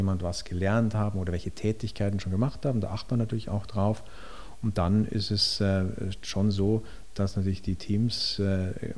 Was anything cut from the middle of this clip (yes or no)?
no